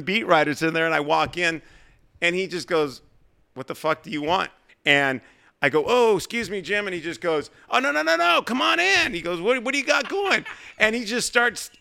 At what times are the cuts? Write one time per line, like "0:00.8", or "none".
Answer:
0:04.7